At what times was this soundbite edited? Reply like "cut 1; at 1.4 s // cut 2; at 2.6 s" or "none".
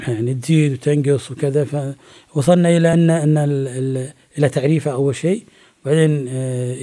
none